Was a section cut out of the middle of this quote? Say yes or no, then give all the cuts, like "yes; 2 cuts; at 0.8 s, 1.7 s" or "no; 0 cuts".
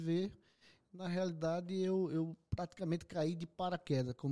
no; 0 cuts